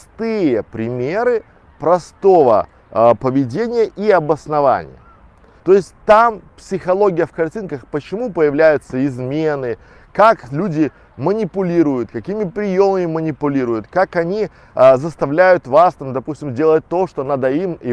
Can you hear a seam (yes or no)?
yes